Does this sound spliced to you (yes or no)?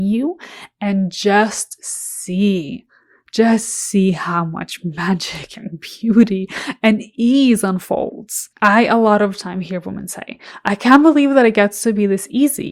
yes